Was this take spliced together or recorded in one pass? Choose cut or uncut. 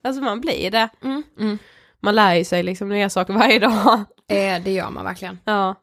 cut